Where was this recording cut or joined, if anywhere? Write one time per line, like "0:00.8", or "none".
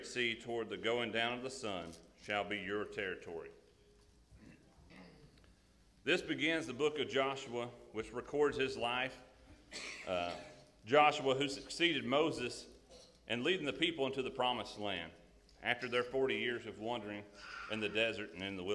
none